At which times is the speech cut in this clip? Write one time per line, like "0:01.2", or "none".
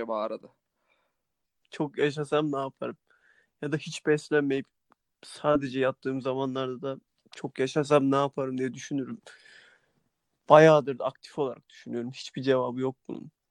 0:01.6